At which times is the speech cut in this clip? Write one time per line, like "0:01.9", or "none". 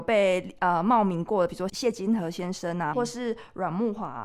0:01.7
0:02.9